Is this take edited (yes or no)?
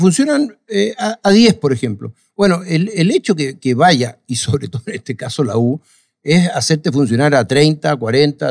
no